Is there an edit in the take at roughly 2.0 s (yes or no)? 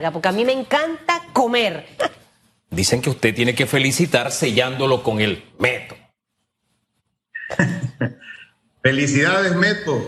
yes